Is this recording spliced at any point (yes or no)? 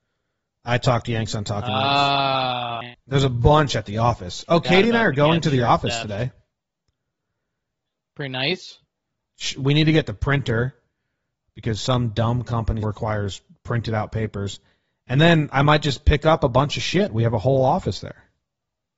yes